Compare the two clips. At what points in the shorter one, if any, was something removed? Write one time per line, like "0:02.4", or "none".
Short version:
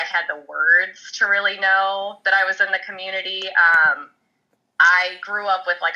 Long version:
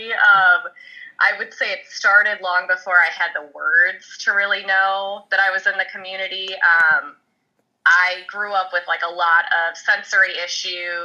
none